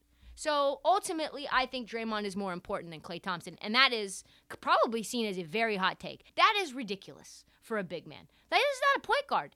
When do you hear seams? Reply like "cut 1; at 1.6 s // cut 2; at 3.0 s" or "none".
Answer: cut 1; at 6.3 s